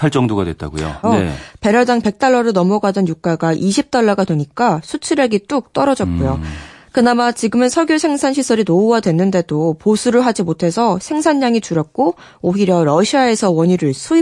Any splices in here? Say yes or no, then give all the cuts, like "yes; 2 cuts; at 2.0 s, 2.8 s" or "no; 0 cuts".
yes; 1 cut; at 1.0 s